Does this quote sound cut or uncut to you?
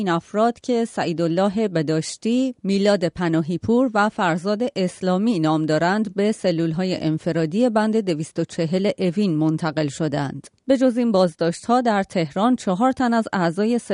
cut